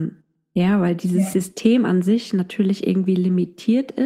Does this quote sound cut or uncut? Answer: uncut